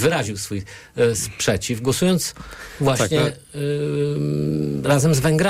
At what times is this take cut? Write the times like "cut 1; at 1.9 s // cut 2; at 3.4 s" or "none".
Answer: none